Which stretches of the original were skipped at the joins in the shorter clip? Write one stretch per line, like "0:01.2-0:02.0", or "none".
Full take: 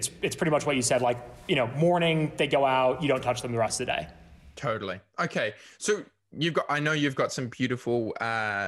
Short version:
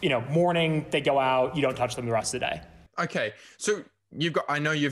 0:04.3-0:05.1

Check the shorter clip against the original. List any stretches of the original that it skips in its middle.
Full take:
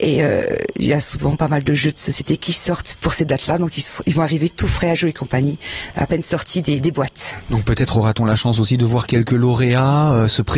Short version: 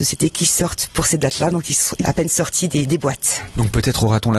0:04.1-0:05.9

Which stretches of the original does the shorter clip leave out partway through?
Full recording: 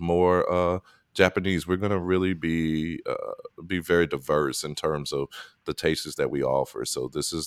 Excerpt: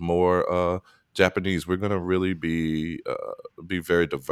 none

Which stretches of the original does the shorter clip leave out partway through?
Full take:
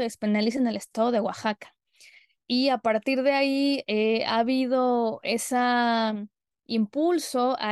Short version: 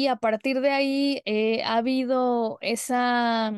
none

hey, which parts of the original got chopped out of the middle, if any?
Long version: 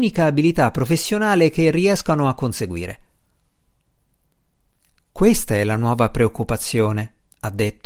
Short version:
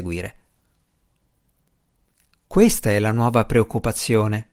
none

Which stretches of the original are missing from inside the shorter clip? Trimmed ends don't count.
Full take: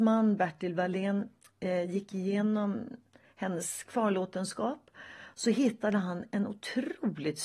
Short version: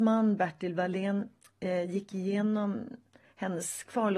none

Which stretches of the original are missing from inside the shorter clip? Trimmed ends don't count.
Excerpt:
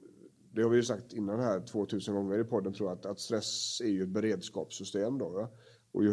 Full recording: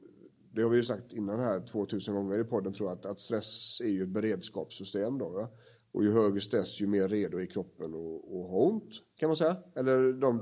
none

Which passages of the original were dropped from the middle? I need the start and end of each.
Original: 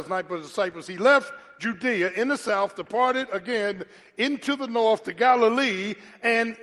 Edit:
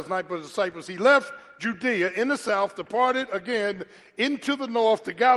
none

